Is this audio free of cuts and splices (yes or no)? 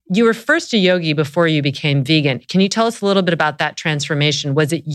yes